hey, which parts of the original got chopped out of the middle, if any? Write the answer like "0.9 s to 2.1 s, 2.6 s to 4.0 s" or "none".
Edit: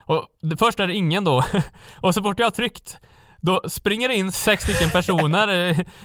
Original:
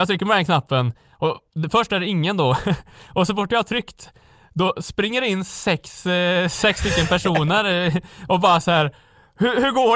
5.5 s to 6.5 s